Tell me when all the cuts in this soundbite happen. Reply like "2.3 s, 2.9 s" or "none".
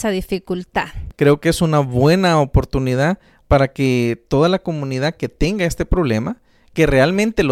1.1 s